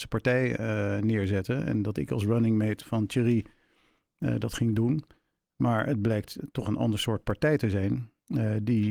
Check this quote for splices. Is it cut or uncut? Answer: uncut